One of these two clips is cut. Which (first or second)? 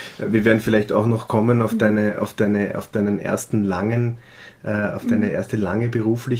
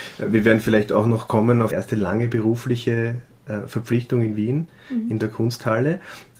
second